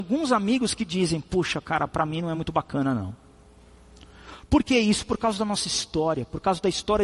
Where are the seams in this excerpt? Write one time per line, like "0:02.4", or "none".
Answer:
none